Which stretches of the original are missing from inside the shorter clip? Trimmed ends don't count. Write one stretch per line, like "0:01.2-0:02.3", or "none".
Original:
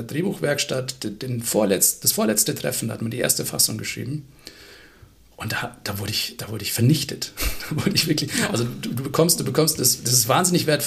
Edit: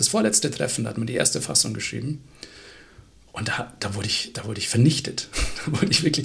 none